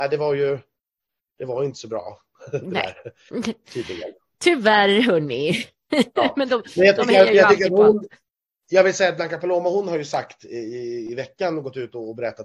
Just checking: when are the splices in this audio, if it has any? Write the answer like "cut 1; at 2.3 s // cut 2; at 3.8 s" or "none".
none